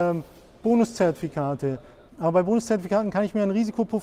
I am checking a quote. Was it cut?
yes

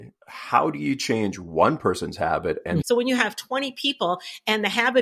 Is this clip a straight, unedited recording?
no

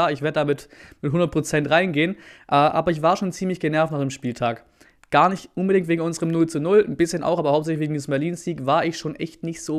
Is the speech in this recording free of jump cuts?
yes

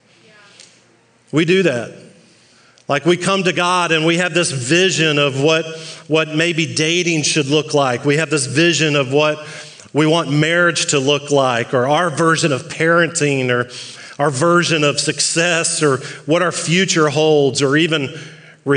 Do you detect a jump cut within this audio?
no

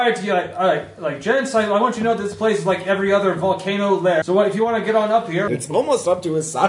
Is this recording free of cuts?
no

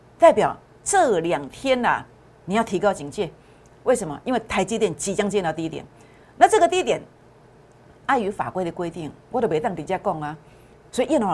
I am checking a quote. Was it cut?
no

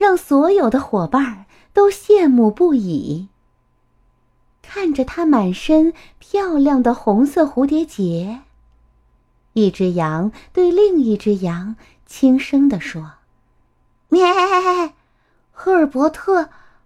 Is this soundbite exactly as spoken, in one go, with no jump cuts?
yes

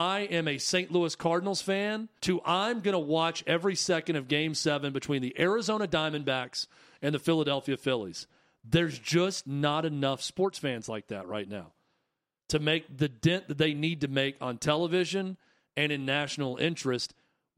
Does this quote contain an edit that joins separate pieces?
yes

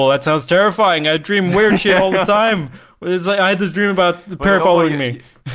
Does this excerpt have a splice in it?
yes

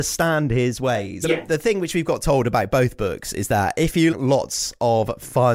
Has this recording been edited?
yes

